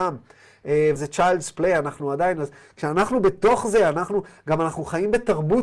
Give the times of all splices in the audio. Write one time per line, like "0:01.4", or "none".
0:01.0